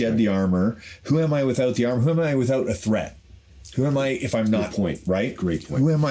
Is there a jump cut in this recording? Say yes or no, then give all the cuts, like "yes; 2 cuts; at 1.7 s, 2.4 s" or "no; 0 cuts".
no; 0 cuts